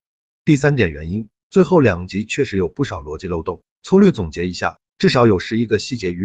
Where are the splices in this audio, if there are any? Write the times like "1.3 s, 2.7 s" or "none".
none